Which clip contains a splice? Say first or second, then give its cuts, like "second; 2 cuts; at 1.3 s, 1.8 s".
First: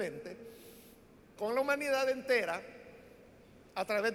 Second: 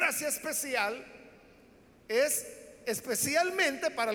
first; 1 cut; at 1.4 s